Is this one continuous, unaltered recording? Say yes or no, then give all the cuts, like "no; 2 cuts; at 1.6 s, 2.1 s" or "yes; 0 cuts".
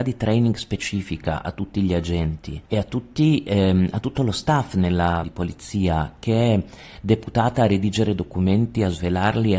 no; 2 cuts; at 2.7 s, 5.2 s